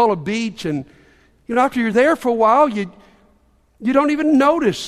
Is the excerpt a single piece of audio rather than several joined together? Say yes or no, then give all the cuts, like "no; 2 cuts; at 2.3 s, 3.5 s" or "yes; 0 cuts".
yes; 0 cuts